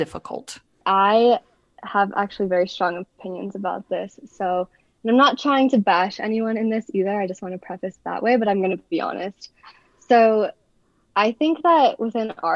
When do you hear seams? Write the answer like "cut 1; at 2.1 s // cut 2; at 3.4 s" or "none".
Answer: none